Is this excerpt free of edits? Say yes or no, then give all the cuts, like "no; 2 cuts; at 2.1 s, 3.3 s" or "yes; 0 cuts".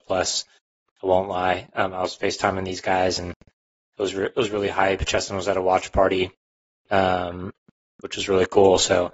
yes; 0 cuts